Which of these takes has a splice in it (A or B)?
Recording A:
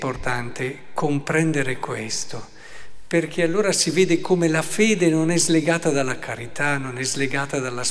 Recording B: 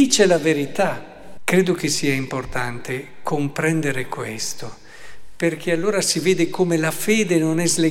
B